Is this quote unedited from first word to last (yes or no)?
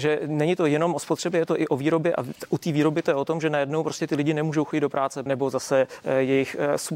no